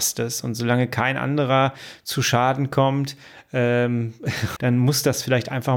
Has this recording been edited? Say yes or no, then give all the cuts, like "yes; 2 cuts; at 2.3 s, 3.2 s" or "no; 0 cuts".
yes; 1 cut; at 4.6 s